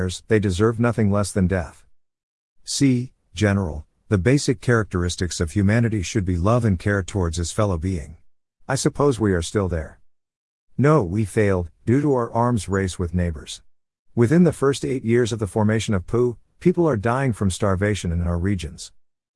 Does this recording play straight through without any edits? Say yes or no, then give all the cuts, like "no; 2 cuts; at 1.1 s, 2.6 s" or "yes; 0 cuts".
no; 1 cut; at 8.6 s